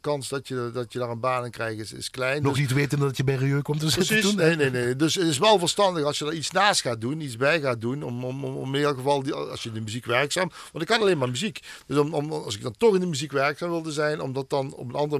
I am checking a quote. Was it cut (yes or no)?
no